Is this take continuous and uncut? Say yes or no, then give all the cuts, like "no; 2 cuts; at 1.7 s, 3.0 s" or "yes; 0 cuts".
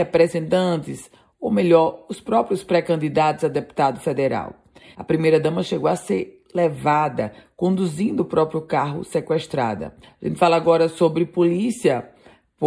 no; 2 cuts; at 4.9 s, 10.0 s